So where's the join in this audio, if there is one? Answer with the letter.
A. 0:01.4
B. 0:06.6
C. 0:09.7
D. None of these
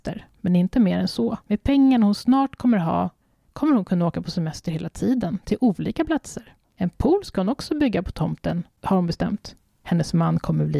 A